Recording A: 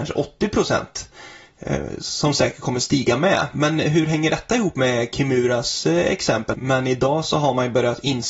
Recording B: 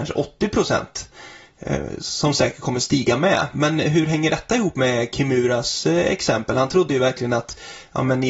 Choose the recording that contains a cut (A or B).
A